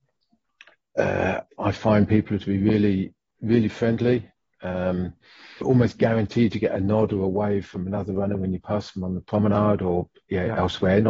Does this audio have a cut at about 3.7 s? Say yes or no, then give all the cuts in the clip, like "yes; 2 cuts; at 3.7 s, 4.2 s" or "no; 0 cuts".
no; 2 cuts; at 1.5 s, 5.6 s